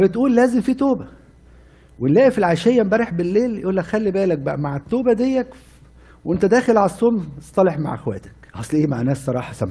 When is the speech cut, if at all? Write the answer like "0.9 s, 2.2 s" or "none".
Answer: 8.5 s